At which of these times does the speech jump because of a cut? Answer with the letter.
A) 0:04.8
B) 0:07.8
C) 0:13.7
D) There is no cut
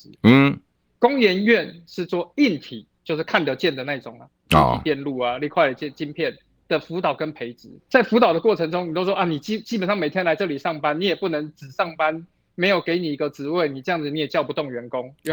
B